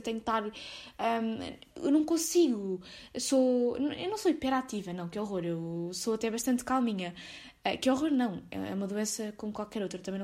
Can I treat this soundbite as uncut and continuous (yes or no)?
yes